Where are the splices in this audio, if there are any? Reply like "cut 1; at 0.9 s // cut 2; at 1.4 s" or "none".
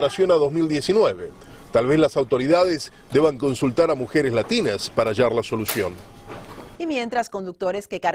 cut 1; at 6.8 s